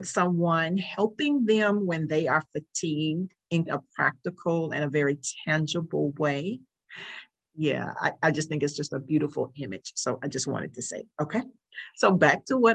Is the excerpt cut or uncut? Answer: cut